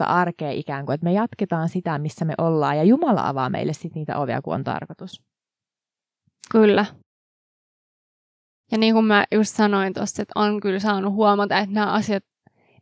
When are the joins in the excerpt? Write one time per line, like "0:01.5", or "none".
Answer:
none